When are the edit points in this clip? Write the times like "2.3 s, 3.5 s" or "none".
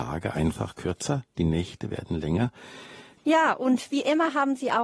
3.2 s